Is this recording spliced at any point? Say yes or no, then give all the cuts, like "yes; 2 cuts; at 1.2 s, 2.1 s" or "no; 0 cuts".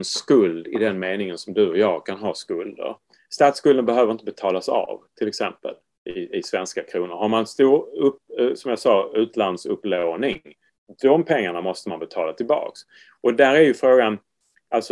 no; 0 cuts